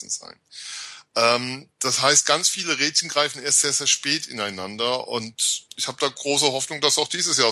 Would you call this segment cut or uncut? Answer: cut